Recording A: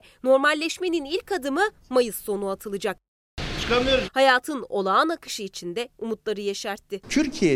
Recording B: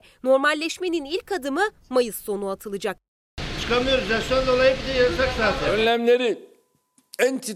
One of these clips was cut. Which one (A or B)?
A